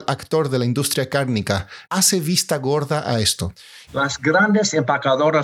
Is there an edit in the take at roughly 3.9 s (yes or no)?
yes